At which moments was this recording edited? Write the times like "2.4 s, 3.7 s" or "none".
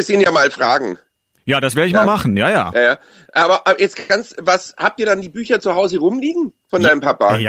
none